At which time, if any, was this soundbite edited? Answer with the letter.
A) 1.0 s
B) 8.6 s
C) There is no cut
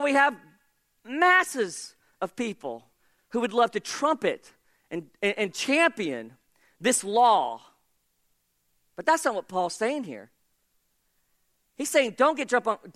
C